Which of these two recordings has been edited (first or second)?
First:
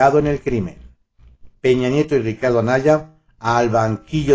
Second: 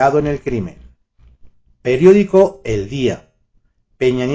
first